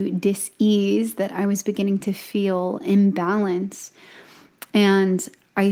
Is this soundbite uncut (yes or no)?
yes